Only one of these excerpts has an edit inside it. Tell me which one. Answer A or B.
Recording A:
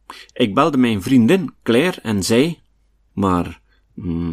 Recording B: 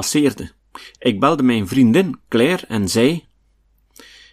A